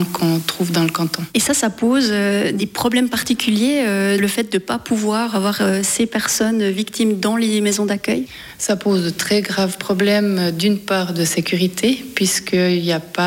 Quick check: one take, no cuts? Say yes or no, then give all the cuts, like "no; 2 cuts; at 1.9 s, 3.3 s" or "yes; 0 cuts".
yes; 0 cuts